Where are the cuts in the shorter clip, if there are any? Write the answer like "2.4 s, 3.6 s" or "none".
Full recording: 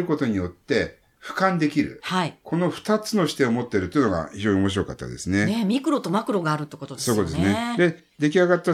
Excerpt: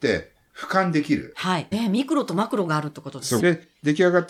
1.7 s, 3.4 s